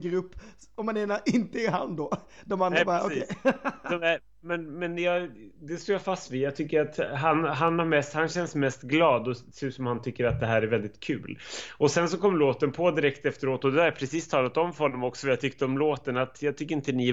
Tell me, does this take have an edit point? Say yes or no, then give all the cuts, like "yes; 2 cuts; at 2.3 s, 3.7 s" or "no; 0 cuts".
no; 0 cuts